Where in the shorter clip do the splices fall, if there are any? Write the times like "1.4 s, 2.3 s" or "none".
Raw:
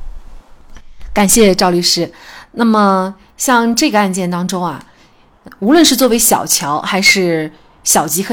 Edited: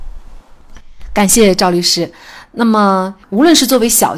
3.2 s